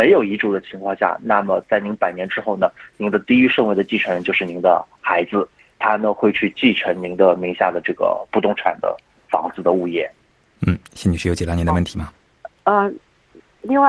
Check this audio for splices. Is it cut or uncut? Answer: uncut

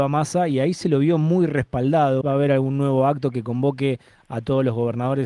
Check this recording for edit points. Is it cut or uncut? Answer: cut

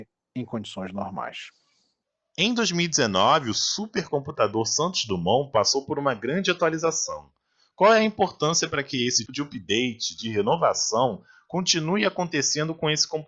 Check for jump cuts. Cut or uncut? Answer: cut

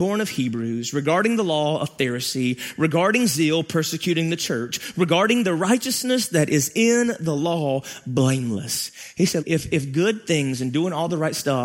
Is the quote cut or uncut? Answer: cut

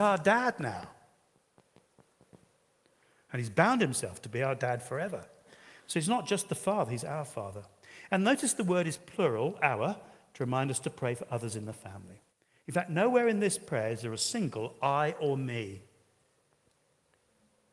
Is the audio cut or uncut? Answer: uncut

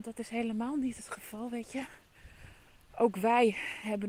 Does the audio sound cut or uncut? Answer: uncut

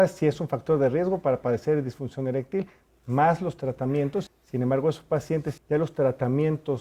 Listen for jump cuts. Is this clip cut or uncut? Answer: cut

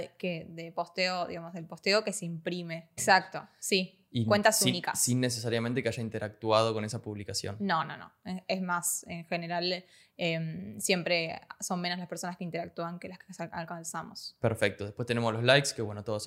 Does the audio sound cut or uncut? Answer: cut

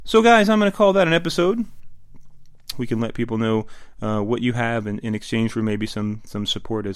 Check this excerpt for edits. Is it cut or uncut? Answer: cut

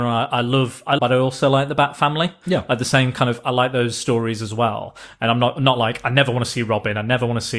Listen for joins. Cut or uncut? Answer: cut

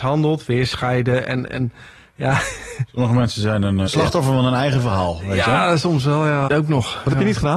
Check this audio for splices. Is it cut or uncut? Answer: cut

